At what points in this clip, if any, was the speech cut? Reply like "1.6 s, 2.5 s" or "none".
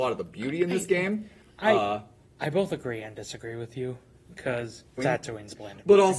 5.0 s

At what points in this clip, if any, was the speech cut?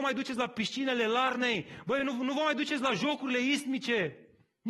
none

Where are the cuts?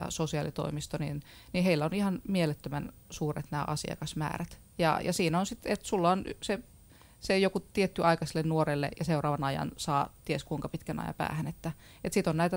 none

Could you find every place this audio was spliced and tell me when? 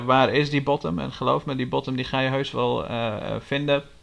none

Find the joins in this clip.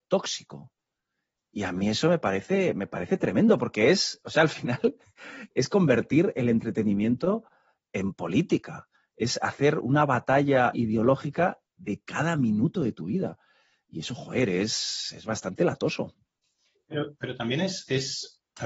10.7 s

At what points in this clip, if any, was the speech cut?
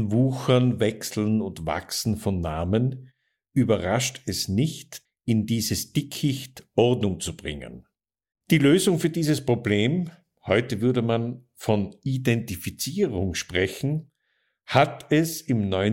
5.1 s, 8.3 s

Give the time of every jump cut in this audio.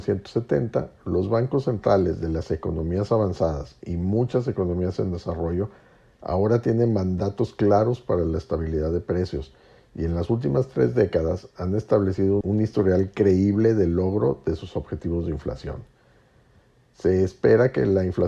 12.4 s

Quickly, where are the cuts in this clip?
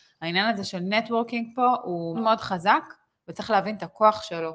2.1 s

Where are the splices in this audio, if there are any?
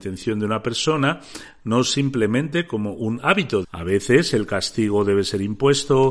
3.6 s

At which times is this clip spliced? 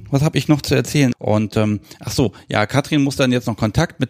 1.1 s

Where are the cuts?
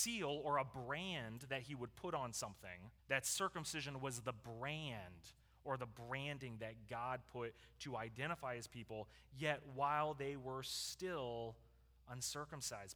3.0 s

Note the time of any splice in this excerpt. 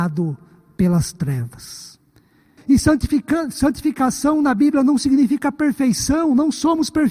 2.6 s

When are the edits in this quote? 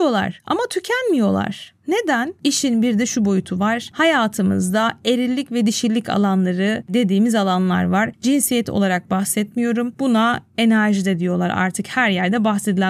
2.4 s

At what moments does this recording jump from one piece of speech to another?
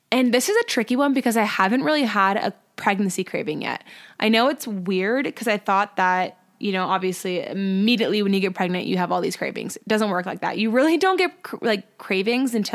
none

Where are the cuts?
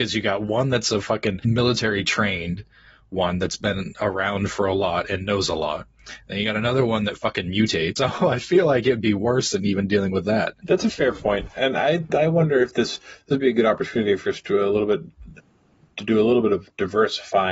none

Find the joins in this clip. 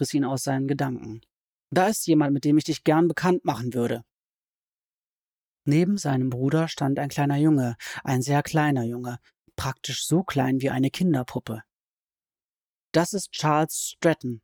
none

